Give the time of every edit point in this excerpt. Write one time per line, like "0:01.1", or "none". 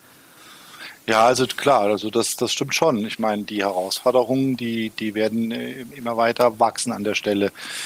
none